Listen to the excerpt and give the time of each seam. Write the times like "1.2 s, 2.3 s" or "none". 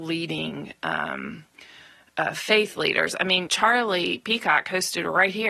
3.5 s